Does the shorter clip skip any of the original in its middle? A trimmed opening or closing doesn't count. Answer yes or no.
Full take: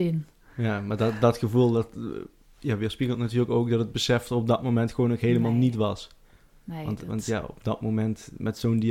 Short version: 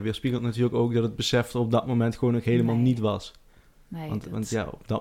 no